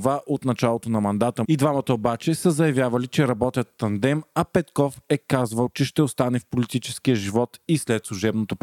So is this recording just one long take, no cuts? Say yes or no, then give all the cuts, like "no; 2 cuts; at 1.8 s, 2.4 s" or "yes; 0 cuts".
no; 1 cut; at 1.4 s